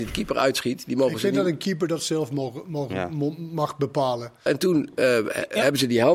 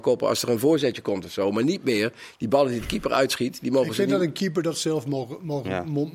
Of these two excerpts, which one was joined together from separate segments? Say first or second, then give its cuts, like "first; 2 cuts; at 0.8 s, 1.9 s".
first; 1 cut; at 4.5 s